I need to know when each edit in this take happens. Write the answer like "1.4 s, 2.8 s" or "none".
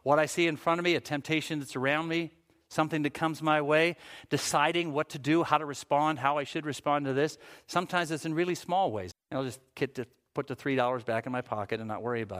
9.1 s